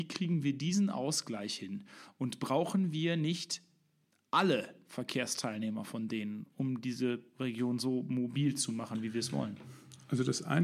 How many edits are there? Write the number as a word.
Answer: zero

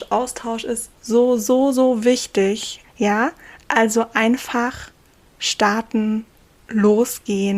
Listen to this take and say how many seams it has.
two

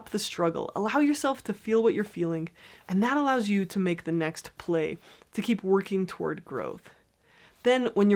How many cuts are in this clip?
one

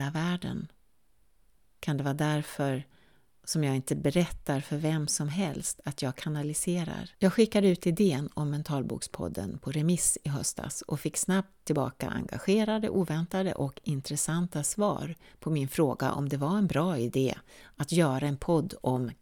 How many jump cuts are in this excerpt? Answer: one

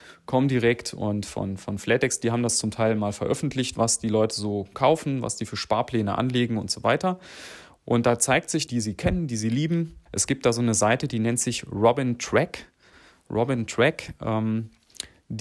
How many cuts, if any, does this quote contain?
two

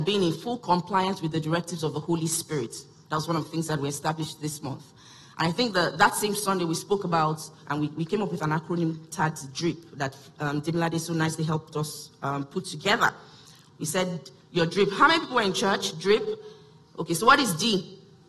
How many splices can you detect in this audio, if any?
one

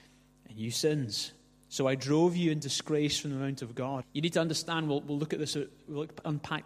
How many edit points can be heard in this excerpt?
one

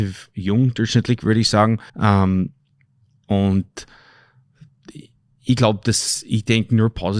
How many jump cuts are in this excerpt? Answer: one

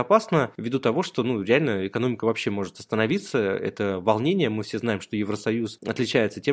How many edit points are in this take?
zero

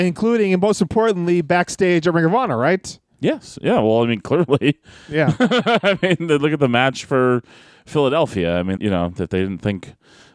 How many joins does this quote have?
one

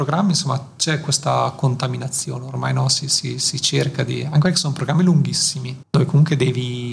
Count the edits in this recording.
one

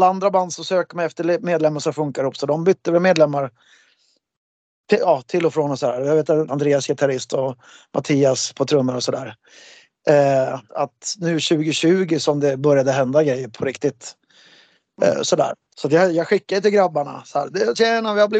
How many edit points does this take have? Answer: three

